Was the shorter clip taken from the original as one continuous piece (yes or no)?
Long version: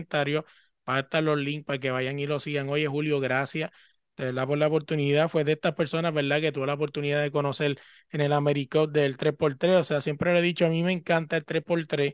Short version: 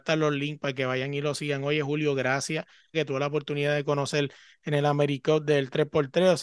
no